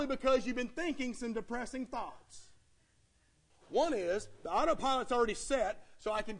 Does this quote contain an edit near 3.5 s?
yes; 1 cut; at 3.5 s

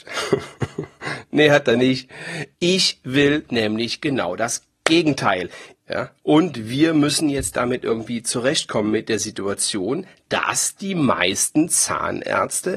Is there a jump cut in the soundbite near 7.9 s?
no; 2 cuts; at 2.5 s, 5.7 s

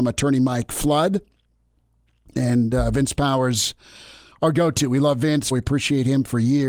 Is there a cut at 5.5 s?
yes; 1 cut; at 5.5 s

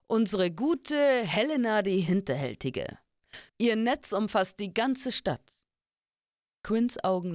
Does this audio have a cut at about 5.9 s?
no; 1 cut; at 3.5 s

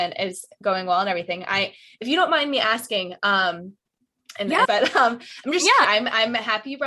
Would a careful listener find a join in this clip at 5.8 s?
yes; 2 cuts; at 4.7 s, 5.8 s

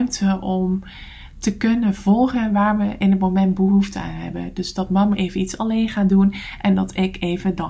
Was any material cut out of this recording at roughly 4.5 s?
no; 0 cuts

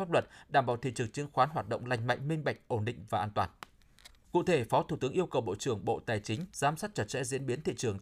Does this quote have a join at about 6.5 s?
yes; 2 cuts; at 4.2 s, 6.5 s

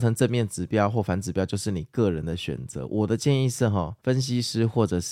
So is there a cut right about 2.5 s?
no; 1 cut; at 4.0 s

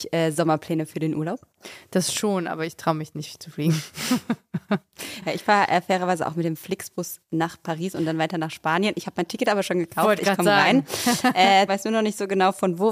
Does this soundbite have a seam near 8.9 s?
no; 1 cut; at 11.7 s

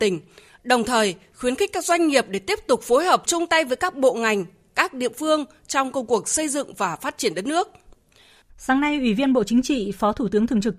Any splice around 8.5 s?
yes; 1 cut; at 8.5 s

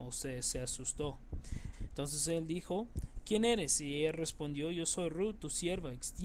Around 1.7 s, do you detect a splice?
yes; 1 cut; at 1.7 s

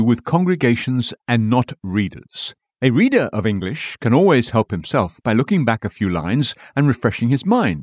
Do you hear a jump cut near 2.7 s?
yes; 1 cut; at 2.7 s

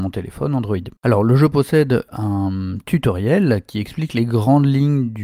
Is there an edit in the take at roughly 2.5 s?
no; 1 cut; at 1.0 s

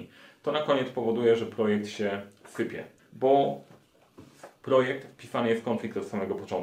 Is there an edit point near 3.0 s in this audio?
yes; 1 cut; at 3.0 s

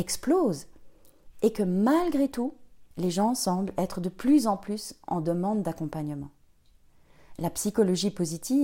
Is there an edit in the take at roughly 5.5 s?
no; 2 cuts; at 2.9 s, 7.3 s

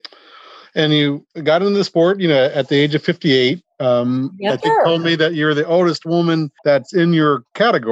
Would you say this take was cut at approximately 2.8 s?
no; 2 cuts; at 4.6 s, 6.6 s

